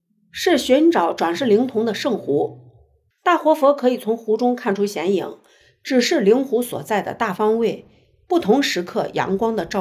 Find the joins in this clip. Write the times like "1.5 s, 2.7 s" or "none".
none